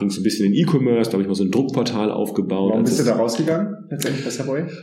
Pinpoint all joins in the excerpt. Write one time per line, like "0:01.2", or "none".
none